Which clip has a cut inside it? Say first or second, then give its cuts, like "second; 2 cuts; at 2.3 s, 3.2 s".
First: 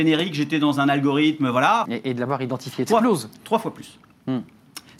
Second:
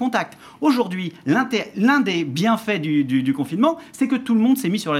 first; 2 cuts; at 1.8 s, 2.9 s